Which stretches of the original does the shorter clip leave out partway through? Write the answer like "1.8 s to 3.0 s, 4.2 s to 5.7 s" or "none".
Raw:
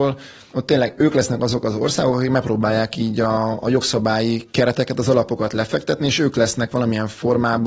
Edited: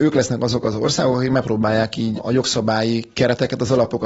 3.1 s to 3.5 s